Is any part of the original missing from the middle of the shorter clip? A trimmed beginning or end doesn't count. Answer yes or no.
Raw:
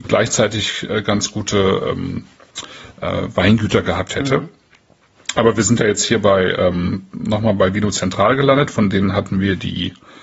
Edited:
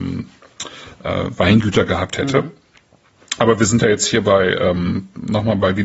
no